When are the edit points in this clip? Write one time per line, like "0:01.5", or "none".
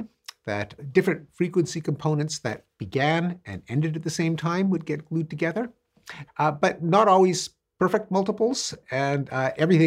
0:06.3